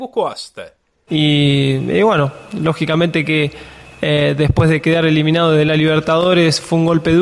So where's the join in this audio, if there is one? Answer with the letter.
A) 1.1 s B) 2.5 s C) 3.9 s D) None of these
A